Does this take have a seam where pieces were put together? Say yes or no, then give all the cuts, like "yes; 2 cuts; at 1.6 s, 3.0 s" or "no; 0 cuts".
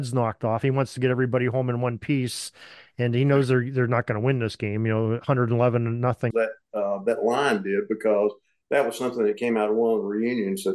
yes; 1 cut; at 6.3 s